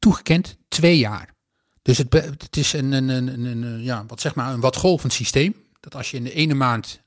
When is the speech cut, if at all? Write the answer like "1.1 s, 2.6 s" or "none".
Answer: none